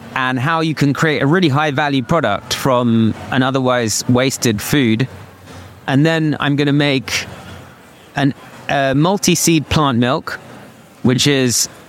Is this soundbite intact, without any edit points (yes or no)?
yes